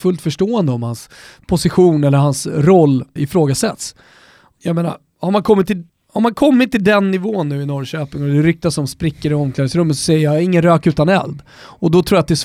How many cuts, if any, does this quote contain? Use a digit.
1